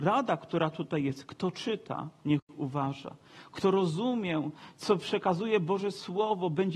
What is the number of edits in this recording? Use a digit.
0